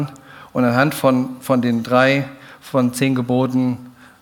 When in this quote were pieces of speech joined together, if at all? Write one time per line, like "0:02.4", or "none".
none